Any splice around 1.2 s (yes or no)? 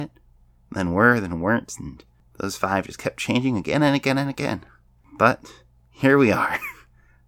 no